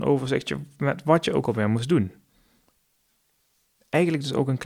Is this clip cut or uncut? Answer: uncut